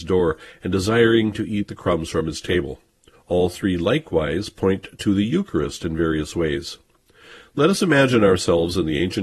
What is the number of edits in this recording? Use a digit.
1